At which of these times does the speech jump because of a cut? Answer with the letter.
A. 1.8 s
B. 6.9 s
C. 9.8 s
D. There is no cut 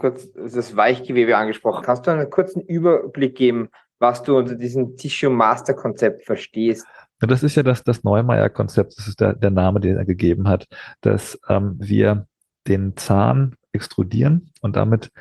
A